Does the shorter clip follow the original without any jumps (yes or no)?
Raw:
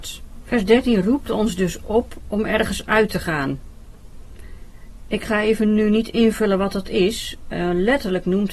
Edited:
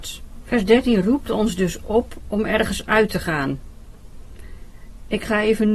yes